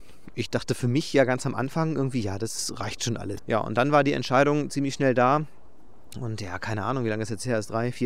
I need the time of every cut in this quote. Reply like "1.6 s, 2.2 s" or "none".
3.4 s